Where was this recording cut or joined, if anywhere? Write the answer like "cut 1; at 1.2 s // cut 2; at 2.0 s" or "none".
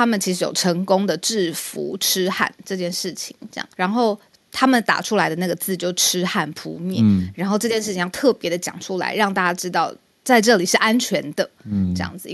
cut 1; at 3.7 s